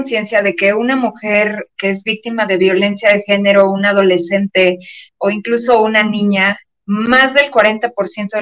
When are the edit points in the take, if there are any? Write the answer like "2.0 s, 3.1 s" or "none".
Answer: 6.7 s